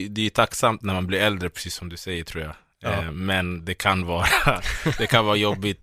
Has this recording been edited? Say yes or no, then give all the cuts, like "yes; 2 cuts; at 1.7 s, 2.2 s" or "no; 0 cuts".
no; 0 cuts